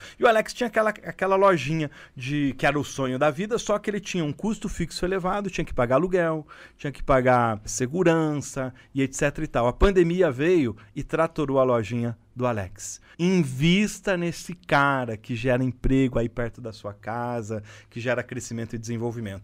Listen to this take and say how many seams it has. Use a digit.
2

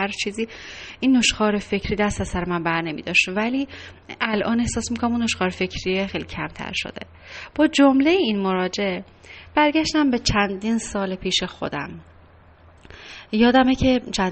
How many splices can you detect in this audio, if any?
1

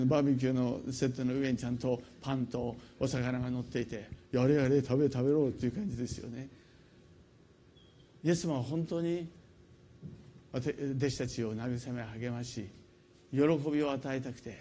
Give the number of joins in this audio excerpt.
0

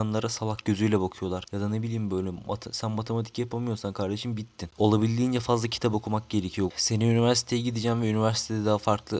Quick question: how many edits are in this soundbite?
2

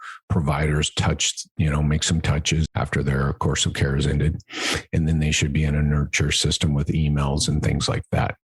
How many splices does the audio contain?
1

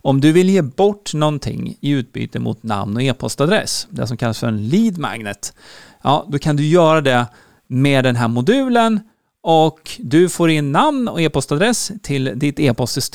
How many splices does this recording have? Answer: 0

